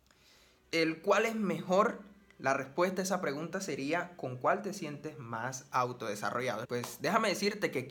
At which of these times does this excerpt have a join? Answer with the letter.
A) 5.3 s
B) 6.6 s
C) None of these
B